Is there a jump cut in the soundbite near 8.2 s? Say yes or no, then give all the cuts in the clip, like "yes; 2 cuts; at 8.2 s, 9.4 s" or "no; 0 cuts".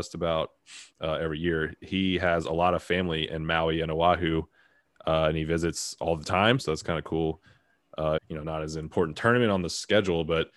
yes; 2 cuts; at 6.6 s, 8.2 s